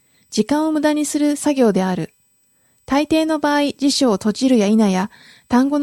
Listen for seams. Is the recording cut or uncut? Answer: uncut